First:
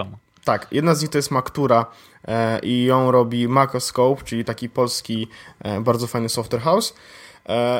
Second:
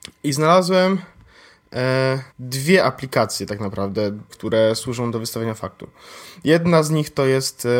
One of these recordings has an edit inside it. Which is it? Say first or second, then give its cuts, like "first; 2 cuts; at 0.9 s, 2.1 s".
second; 2 cuts; at 2.3 s, 4.3 s